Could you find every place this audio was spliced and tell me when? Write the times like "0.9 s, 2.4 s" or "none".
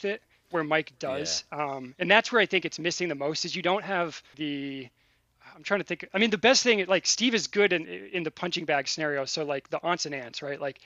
4.3 s